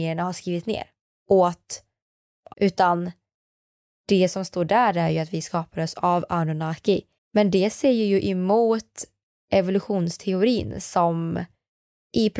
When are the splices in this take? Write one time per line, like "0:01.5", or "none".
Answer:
0:02.5
0:07.2